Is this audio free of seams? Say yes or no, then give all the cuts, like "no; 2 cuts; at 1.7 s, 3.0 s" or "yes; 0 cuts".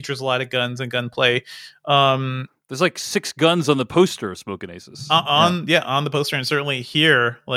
yes; 0 cuts